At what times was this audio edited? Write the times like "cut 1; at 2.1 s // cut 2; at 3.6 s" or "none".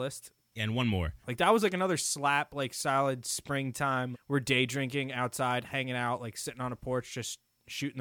cut 1; at 1.2 s // cut 2; at 4.1 s